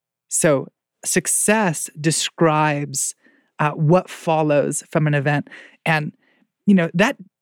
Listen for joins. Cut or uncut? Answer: uncut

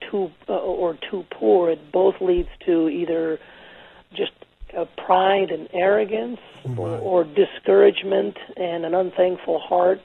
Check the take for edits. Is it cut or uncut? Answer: uncut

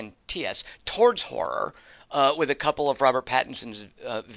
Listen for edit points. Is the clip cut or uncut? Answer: uncut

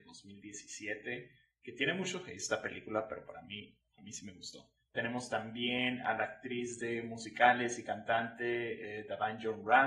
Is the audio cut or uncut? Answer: cut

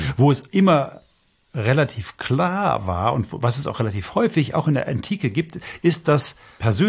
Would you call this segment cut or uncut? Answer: uncut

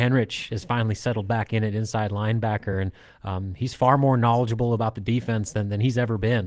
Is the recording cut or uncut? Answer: uncut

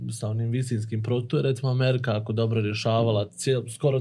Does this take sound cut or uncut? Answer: uncut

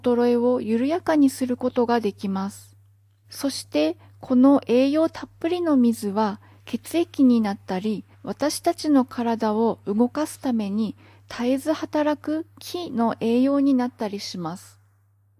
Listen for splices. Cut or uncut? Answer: cut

